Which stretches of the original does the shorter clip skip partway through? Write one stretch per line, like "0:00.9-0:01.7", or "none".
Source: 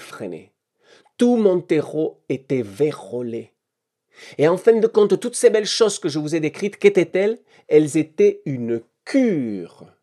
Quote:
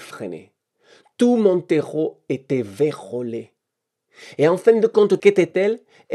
0:05.2-0:06.8